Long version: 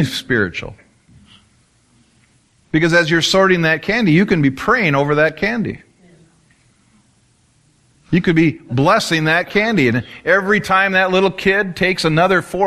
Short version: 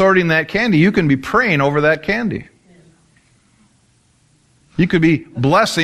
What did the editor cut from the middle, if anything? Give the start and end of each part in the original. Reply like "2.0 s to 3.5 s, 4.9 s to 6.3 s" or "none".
none